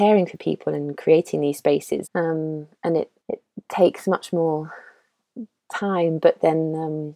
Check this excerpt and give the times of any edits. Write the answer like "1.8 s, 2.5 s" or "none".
2.0 s, 3.2 s